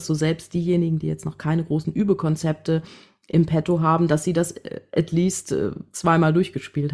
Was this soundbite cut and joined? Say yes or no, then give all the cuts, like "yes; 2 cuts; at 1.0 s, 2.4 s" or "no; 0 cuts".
no; 0 cuts